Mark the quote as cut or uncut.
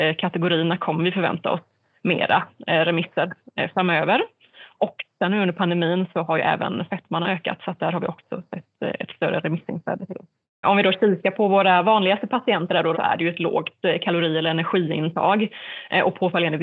cut